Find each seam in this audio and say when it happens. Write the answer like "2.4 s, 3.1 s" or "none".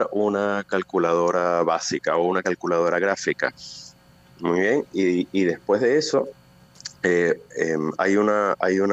none